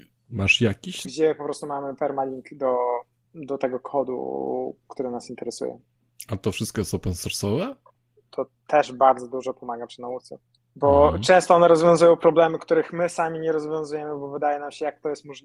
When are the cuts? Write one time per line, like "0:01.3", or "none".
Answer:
0:01.0
0:08.2